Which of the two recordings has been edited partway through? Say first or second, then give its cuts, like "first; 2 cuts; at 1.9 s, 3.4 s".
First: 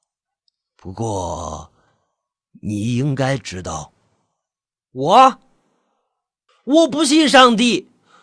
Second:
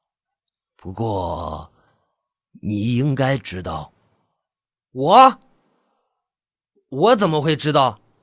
first; 1 cut; at 6.5 s